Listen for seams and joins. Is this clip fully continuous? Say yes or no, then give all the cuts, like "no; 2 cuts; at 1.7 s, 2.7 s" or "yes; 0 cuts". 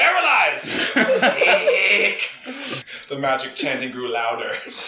no; 1 cut; at 2.8 s